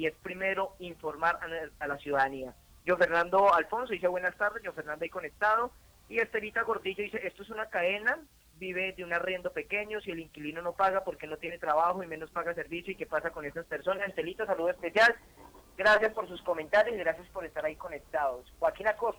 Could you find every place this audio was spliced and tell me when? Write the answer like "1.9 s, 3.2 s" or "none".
8.5 s